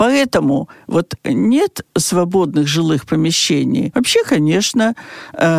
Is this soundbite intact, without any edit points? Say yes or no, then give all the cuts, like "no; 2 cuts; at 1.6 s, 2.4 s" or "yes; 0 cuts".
no; 2 cuts; at 1.2 s, 3.9 s